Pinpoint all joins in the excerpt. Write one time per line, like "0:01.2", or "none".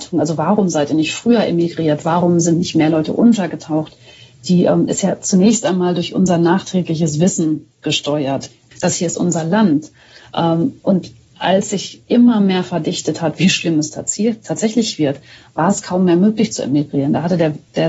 0:08.7